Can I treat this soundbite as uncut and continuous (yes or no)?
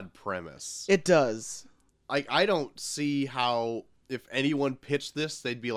no